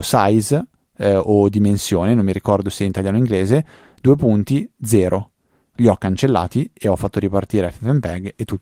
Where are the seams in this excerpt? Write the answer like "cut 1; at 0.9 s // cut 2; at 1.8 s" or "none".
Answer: cut 1; at 5.7 s